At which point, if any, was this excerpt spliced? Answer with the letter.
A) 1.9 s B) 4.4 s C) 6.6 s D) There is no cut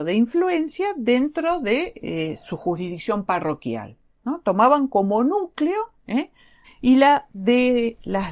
C